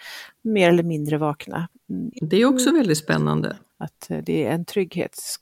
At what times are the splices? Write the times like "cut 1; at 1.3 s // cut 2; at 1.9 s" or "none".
cut 1; at 2.1 s // cut 2; at 3.7 s